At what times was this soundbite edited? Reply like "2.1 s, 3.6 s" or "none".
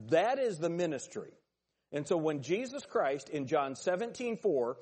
none